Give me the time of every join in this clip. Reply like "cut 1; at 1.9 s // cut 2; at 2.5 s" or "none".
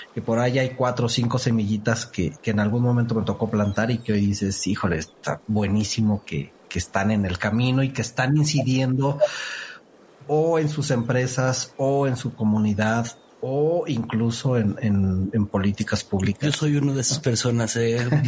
none

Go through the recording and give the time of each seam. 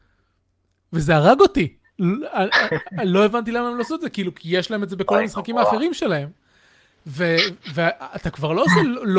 cut 1; at 6.9 s

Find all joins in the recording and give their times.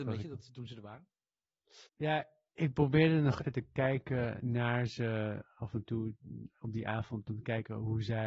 cut 1; at 1.9 s // cut 2; at 3.4 s

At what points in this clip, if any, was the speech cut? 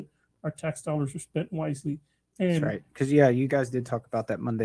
none

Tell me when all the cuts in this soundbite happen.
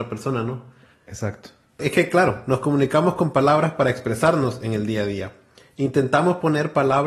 none

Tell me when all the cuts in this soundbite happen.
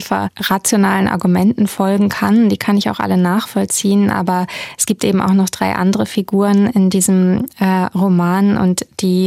none

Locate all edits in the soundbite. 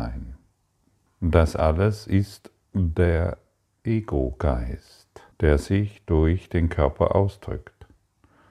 cut 1; at 1.1 s // cut 2; at 5.3 s

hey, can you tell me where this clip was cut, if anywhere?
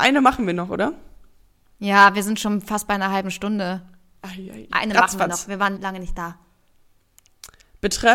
cut 1; at 4.7 s // cut 2; at 5.8 s

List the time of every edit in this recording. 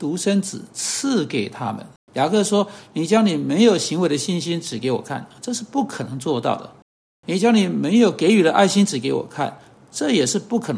cut 1; at 2.0 s

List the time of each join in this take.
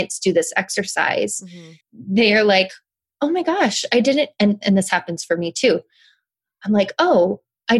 cut 1; at 1.8 s

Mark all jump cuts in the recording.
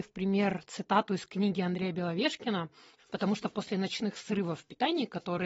cut 1; at 3.0 s

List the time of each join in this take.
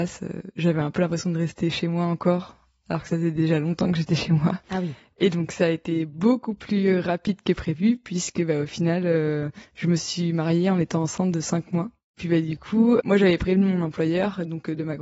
cut 1; at 4.6 s

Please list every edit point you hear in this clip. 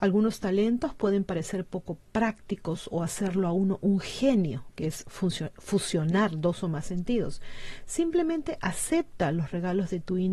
cut 1; at 4.7 s

